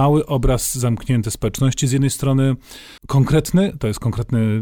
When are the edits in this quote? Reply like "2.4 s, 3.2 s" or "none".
3.0 s